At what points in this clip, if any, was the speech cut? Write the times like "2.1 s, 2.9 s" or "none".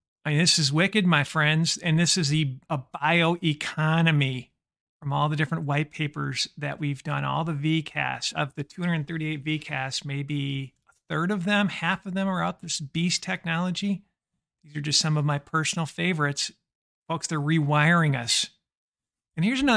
none